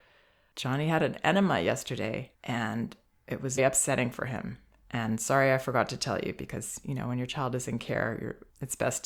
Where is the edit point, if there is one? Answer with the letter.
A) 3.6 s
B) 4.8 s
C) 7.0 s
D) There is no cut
A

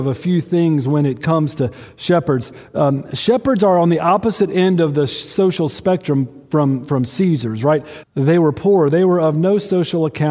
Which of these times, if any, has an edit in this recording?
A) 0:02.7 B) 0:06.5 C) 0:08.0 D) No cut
C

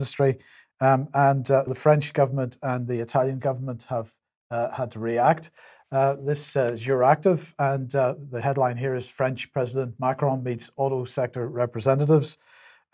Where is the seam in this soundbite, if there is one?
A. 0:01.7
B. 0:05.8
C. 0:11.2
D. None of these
A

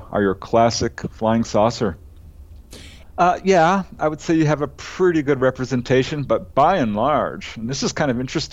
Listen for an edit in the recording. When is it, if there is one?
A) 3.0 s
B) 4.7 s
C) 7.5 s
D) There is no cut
A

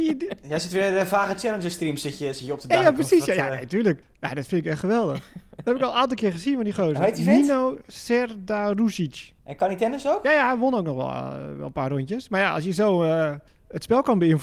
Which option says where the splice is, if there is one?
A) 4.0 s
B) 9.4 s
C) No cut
B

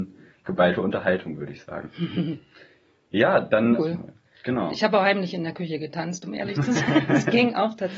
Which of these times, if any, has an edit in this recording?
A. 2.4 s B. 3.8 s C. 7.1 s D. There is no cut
B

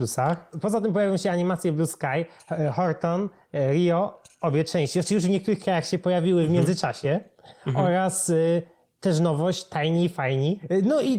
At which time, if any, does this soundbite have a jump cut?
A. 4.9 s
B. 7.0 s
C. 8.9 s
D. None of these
D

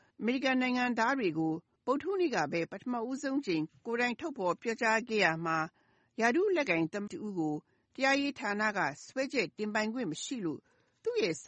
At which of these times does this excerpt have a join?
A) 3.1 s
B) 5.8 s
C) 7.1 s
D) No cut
C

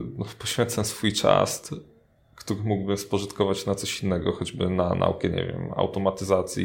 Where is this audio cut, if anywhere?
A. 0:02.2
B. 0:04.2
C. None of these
C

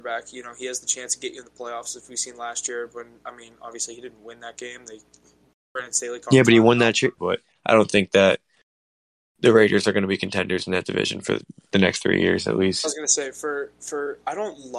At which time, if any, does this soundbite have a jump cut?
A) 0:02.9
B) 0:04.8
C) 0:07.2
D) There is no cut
C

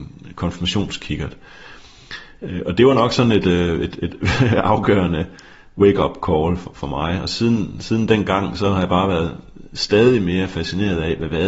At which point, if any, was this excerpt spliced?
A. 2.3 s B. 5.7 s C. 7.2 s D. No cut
D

